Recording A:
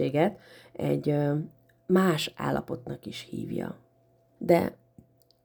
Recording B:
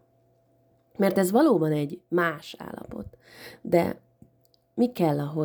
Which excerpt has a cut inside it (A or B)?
A